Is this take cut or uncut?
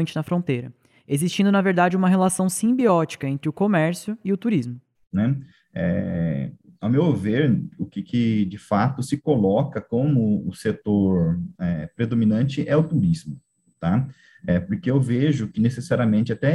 cut